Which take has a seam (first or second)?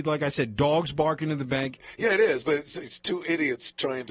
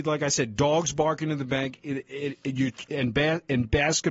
first